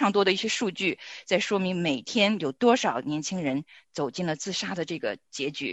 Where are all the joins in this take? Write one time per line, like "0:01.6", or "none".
none